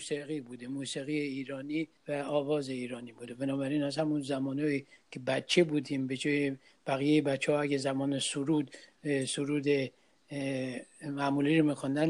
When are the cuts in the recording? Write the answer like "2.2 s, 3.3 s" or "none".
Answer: 2.0 s